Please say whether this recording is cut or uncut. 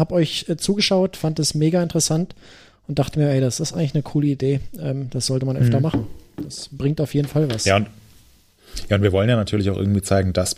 uncut